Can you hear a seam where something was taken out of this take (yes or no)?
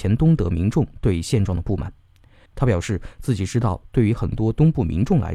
yes